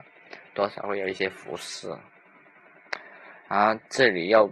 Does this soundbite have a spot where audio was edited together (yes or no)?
no